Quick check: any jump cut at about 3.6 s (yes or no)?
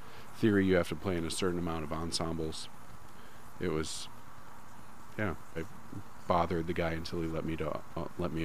no